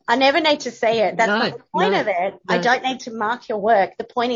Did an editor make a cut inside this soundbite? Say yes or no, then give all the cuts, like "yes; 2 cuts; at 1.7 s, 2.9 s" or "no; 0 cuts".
no; 0 cuts